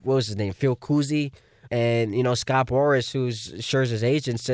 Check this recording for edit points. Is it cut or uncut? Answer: cut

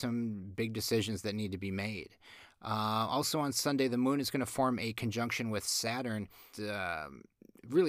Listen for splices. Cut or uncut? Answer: cut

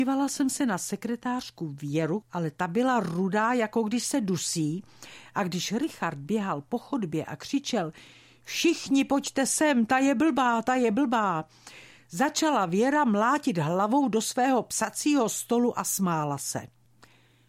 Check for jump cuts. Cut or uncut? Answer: uncut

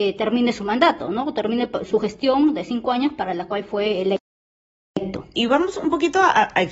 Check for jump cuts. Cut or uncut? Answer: cut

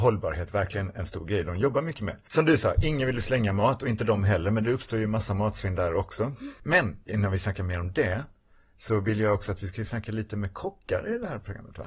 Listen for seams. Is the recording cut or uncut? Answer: uncut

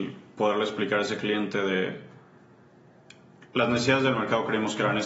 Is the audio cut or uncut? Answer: uncut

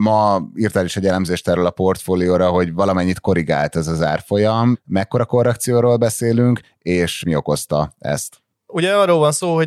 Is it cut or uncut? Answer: uncut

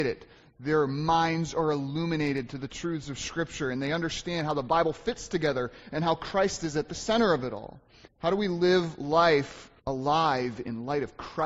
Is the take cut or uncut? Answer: cut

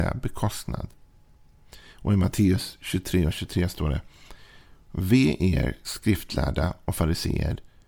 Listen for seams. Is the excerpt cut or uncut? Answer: uncut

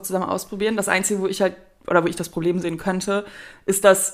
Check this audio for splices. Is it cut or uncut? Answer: uncut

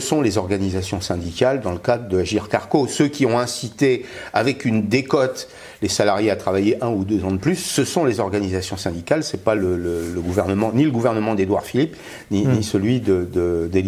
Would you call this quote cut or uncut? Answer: uncut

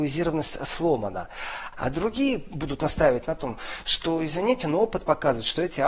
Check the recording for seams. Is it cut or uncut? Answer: cut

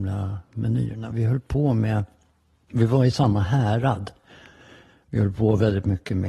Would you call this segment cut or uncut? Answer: uncut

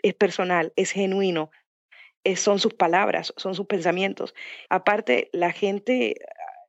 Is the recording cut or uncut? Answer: cut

